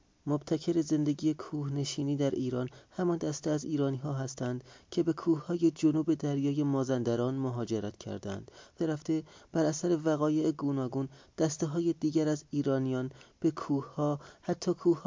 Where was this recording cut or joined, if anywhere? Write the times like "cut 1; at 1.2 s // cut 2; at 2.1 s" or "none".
cut 1; at 8.8 s